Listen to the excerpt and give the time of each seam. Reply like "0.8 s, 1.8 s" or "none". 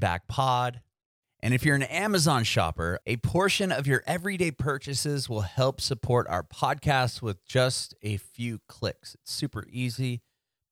none